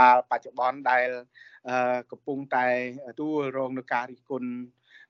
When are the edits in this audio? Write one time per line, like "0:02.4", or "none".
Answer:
0:03.1